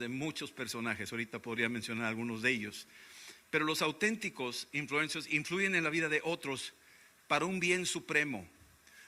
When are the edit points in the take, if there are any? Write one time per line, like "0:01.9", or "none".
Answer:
none

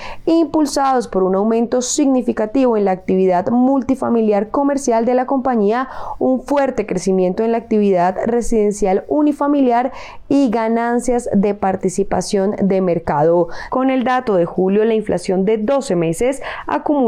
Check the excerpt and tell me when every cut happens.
0:13.7

